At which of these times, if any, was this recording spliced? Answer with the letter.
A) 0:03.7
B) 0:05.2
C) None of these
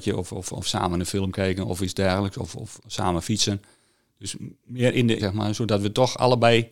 B